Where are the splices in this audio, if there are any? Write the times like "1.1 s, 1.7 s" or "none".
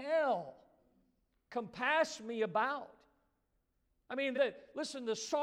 4.3 s